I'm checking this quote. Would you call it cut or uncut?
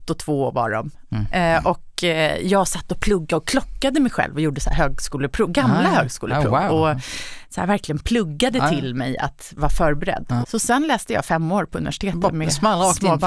cut